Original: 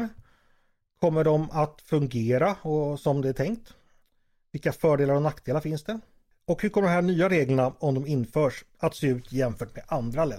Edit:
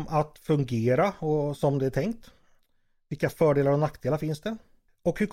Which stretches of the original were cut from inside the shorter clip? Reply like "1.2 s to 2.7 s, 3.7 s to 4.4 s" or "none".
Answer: none